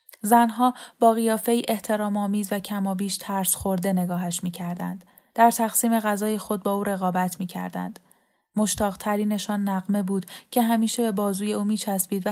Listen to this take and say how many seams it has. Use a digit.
1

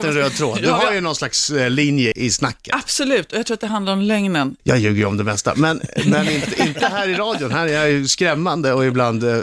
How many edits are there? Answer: 2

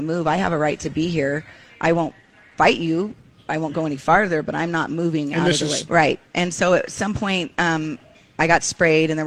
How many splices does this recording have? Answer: 1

